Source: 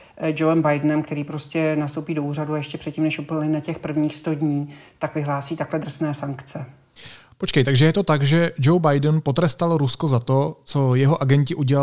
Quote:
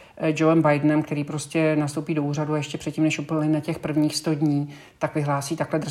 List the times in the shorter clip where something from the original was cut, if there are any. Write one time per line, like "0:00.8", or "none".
none